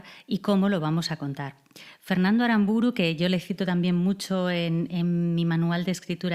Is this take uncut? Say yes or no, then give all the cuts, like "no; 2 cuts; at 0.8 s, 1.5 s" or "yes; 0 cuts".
yes; 0 cuts